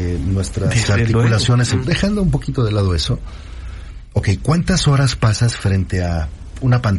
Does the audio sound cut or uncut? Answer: cut